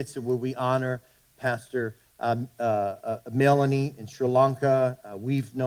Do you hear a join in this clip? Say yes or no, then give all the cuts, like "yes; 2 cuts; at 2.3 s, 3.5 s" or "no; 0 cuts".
no; 0 cuts